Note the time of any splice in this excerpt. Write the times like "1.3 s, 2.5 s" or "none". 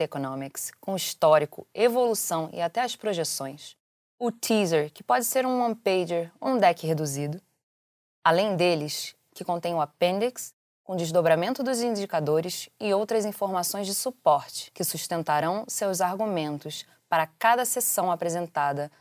6.5 s, 9.3 s